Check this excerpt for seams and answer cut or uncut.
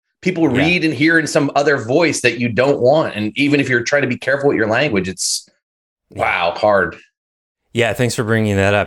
uncut